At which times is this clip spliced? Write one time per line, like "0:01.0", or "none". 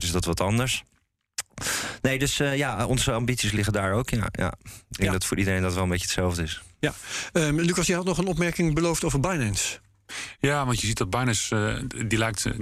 none